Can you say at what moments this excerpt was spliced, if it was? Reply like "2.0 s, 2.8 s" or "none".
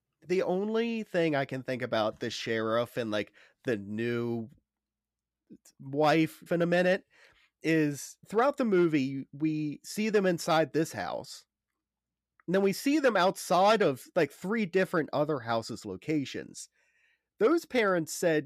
6.5 s, 8.2 s